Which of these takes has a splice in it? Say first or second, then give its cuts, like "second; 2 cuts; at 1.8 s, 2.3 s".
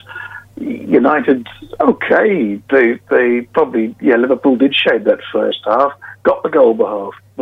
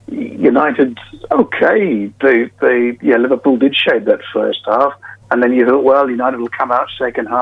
second; 2 cuts; at 3.0 s, 5.2 s